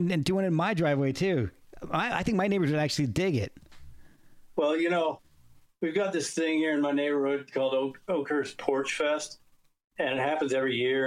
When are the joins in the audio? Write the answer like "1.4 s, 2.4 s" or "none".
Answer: none